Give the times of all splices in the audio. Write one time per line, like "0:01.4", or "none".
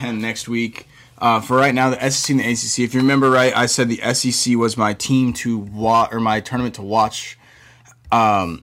none